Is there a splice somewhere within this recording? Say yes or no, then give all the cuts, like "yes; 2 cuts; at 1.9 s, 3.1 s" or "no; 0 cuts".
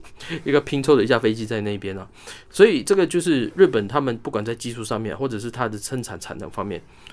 no; 0 cuts